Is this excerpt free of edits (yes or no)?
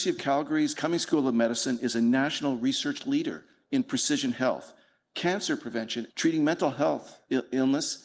no